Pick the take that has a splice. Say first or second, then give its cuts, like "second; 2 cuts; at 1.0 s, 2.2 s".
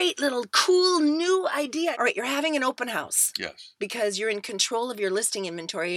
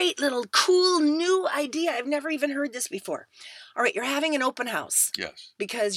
first; 1 cut; at 1.9 s